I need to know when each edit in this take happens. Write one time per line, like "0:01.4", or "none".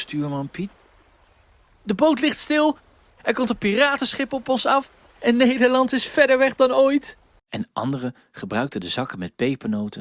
0:03.1
0:07.4